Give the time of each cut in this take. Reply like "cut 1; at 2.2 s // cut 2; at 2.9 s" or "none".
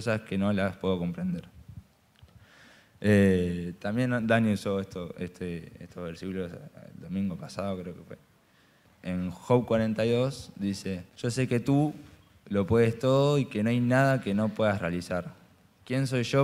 cut 1; at 8.8 s // cut 2; at 11.1 s